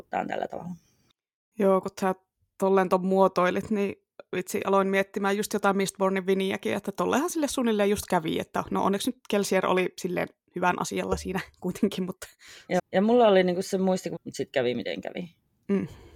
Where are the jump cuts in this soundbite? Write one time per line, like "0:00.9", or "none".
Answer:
0:12.8
0:14.2

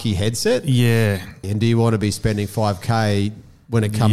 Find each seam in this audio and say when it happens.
0:01.4

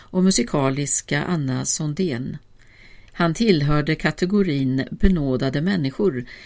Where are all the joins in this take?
0:03.1

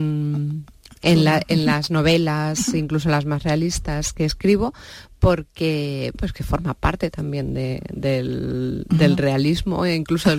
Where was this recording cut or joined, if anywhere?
0:06.1

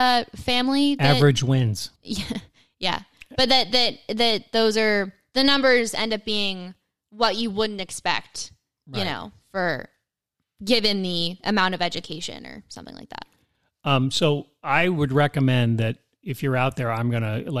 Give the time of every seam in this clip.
0:01.9

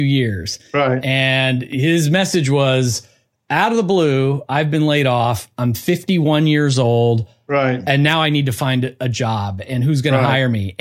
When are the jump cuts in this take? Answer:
none

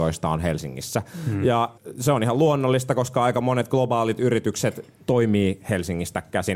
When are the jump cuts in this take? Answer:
0:05.0

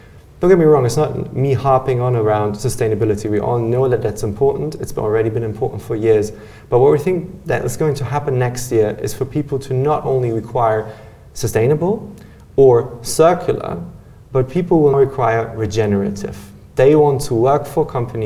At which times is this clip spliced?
0:14.9

